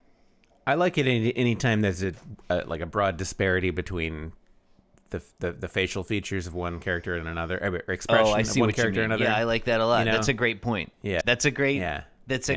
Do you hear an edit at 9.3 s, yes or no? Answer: no